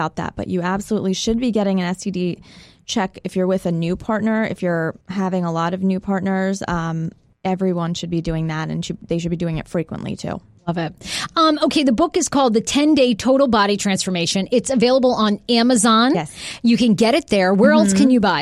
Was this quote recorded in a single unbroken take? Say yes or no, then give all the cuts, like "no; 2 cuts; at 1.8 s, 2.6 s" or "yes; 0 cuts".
no; 1 cut; at 5.0 s